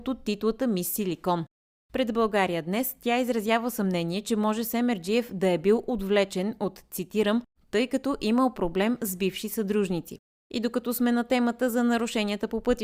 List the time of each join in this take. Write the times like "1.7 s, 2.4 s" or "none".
7.6 s, 10.3 s